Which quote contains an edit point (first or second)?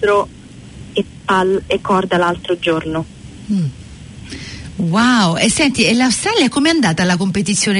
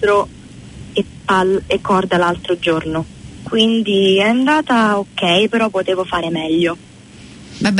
second